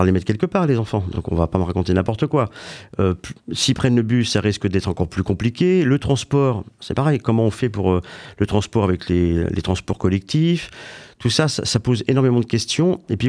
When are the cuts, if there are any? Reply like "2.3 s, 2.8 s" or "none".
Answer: none